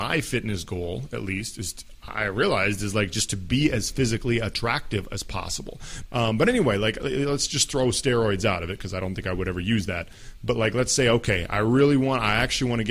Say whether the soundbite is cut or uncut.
cut